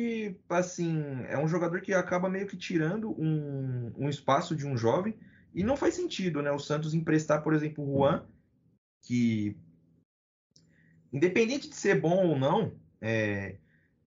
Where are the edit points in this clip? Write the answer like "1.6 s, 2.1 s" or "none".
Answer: none